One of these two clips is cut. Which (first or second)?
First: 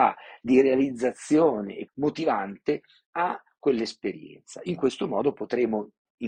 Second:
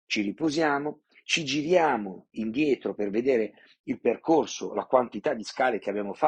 first